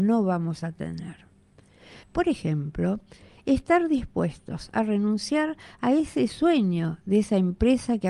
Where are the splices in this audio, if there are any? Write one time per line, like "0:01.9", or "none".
0:02.0